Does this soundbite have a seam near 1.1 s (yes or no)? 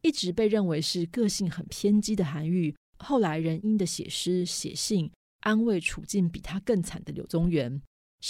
no